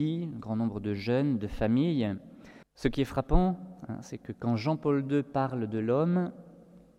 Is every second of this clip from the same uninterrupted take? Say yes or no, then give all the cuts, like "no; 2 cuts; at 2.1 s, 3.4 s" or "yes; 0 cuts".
no; 1 cut; at 2.6 s